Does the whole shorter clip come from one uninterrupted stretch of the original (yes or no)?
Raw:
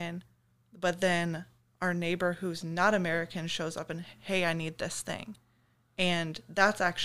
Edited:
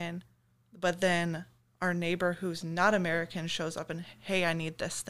yes